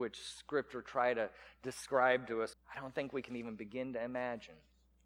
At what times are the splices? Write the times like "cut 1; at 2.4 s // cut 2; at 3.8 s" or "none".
cut 1; at 2.5 s

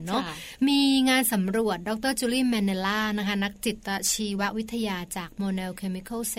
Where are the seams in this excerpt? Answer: none

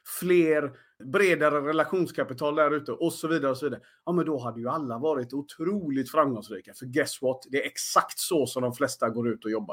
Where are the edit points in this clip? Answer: cut 1; at 1.0 s

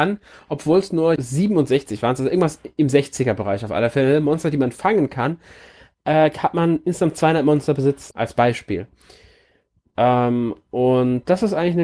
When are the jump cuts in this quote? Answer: cut 1; at 1.2 s // cut 2; at 8.1 s

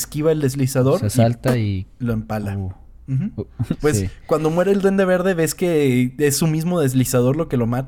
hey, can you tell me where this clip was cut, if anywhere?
cut 1; at 3.8 s

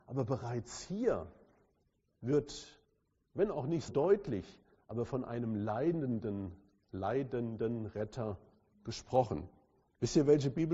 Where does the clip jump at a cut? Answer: cut 1; at 3.9 s

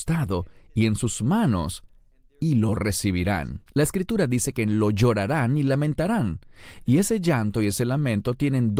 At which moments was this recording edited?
cut 1; at 3.7 s

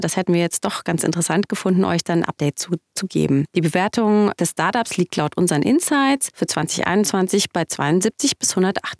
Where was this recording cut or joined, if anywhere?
none

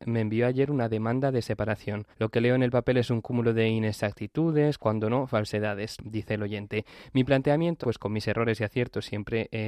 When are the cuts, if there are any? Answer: cut 1; at 2.1 s // cut 2; at 7.8 s

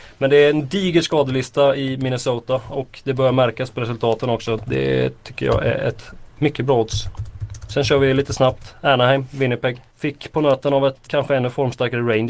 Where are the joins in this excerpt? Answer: cut 1; at 4.6 s // cut 2; at 9.9 s // cut 3; at 11.1 s

